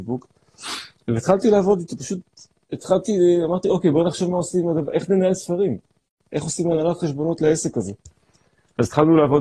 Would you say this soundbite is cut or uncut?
uncut